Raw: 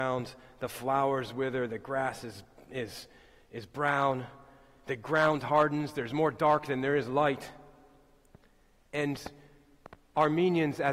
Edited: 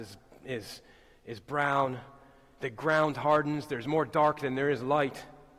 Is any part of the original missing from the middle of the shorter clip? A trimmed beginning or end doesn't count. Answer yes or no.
no